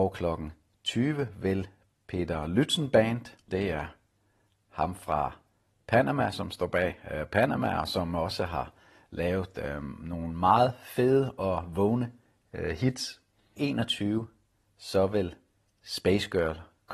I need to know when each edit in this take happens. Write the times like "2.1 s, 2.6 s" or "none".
3.5 s, 13.6 s

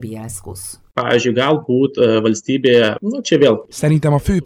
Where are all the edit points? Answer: none

